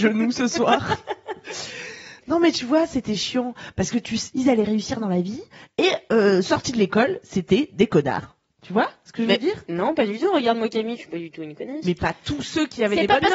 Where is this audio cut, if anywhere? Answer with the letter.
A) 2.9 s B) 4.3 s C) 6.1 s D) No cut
B